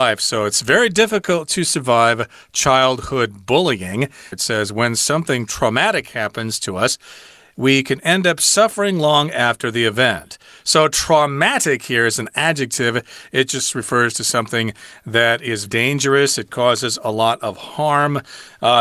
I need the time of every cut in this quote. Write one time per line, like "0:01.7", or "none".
0:04.3
0:15.7